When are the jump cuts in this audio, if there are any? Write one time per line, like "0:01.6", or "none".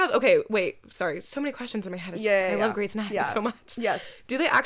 none

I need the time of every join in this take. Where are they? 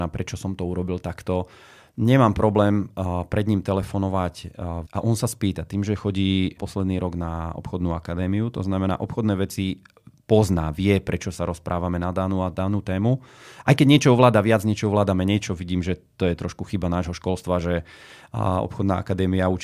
0:04.9
0:06.6

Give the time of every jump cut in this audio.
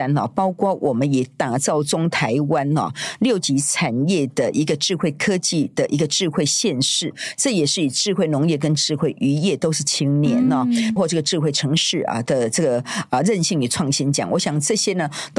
0:11.0

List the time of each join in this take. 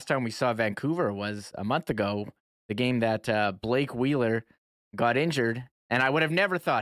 0:05.8

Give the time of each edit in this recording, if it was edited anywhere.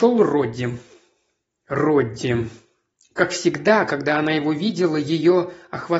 none

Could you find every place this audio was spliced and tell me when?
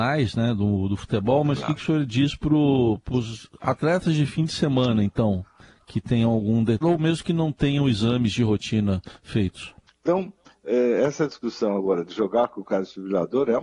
0:06.8
0:09.9

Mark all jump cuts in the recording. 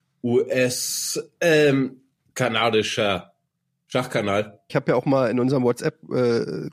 0:04.7

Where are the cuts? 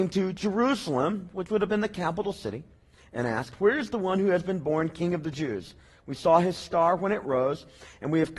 none

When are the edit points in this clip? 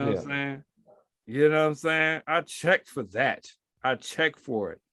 0:01.1

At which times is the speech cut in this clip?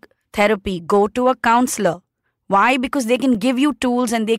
none

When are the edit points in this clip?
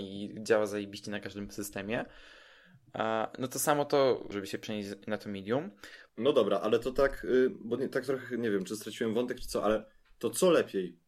0:04.3
0:06.1

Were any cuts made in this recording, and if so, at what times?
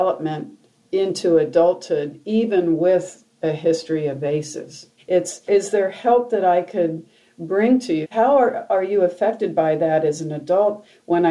0:05.0
0:08.0

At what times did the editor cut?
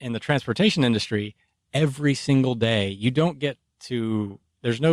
none

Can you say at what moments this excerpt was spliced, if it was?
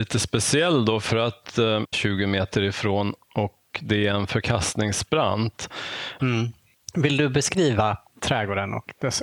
0:01.9
0:06.2

